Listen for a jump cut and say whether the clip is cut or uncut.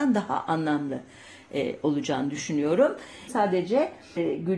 cut